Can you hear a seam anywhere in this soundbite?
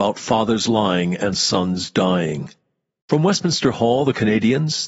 yes; 1 cut; at 3.0 s

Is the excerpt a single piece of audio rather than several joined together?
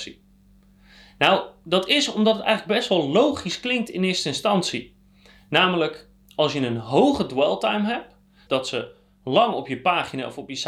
no; 1 cut; at 8.5 s

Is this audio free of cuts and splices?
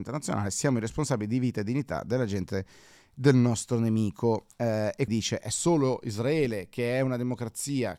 no; 1 cut; at 5.1 s

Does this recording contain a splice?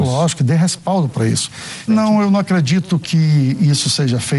yes; 1 cut; at 1.9 s

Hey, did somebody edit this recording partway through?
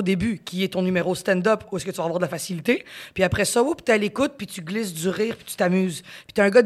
no; 0 cuts

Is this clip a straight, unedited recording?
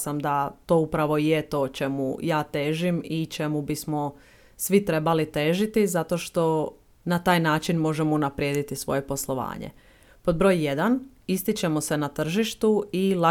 yes; 0 cuts

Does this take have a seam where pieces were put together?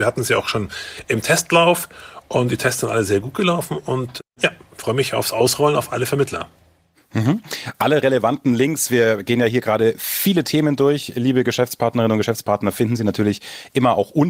no; 0 cuts

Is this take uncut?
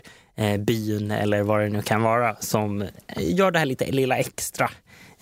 no; 1 cut; at 2.4 s

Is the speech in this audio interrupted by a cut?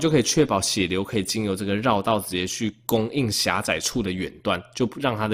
no; 0 cuts

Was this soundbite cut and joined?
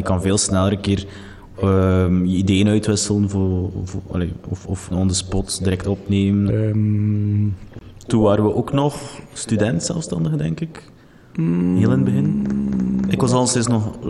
yes; 2 cuts; at 4.9 s, 6.5 s

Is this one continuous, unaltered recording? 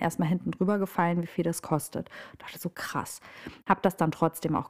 yes; 0 cuts

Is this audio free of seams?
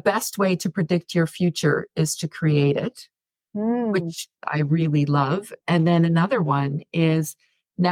yes; 0 cuts

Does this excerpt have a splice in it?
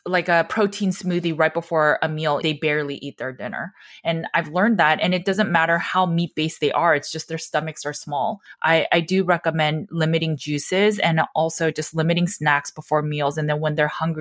yes; 1 cut; at 2.4 s

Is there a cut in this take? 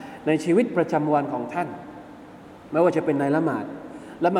no; 0 cuts

